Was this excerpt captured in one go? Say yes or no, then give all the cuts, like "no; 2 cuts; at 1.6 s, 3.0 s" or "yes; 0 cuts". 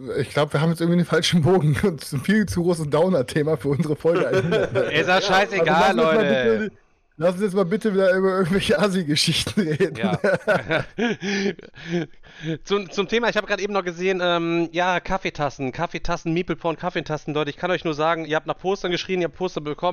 yes; 0 cuts